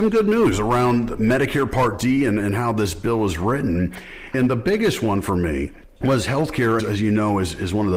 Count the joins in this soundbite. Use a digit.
2